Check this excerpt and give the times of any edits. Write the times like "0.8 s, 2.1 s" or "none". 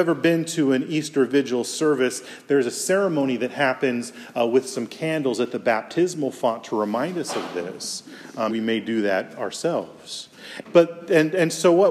8.5 s, 10.6 s